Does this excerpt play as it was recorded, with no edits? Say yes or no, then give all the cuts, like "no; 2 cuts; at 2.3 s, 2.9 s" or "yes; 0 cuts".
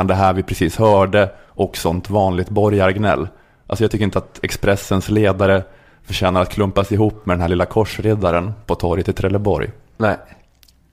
yes; 0 cuts